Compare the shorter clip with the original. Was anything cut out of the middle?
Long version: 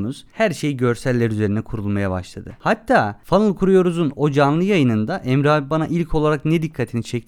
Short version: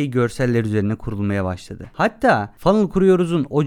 no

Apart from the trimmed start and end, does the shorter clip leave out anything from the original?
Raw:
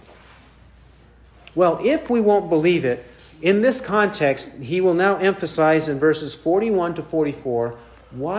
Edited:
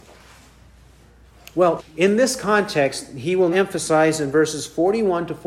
yes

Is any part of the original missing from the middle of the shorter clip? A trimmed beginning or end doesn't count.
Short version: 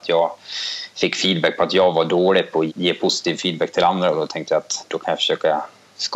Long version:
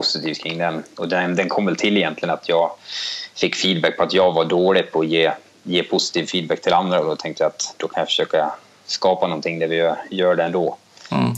yes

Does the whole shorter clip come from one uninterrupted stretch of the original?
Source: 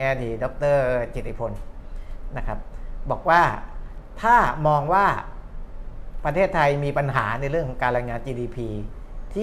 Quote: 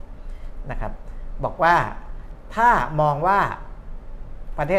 yes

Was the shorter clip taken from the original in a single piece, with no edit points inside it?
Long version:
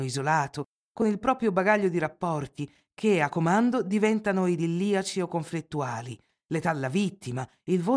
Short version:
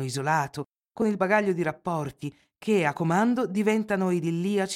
no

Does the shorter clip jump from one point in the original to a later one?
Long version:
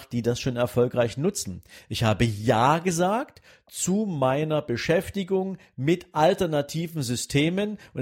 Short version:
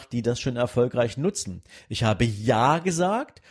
no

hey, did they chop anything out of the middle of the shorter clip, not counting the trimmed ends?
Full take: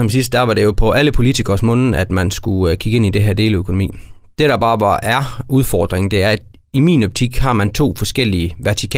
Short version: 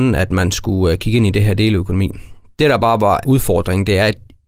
yes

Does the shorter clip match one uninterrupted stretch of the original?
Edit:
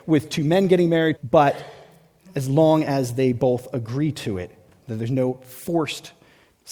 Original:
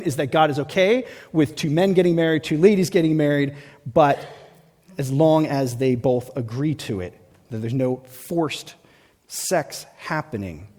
no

